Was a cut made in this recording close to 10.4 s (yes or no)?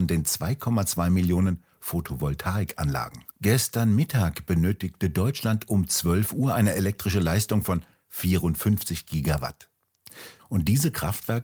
yes